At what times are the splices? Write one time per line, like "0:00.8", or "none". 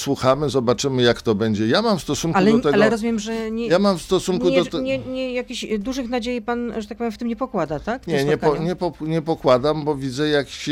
none

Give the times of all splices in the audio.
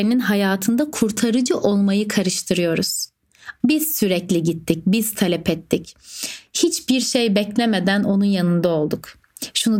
0:03.6

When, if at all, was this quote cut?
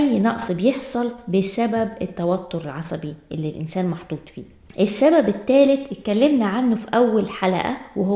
0:04.7

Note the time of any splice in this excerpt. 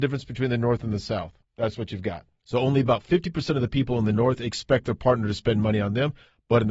0:01.5

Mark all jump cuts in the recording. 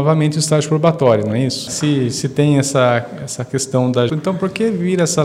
0:01.7
0:04.1

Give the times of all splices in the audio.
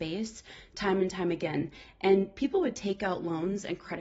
none

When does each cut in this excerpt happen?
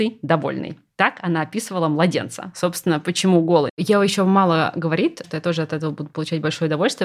0:03.7
0:05.2

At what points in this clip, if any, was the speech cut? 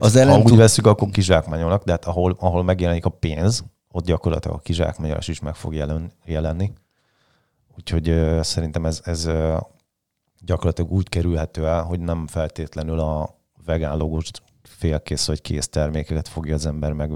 none

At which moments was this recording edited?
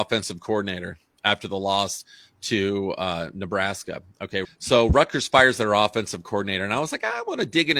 0:04.4

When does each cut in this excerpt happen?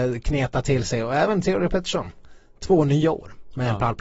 none

